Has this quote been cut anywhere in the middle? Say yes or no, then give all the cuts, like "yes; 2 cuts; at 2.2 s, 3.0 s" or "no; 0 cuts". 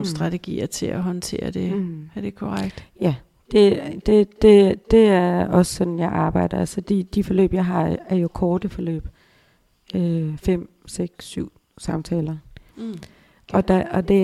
yes; 1 cut; at 12.7 s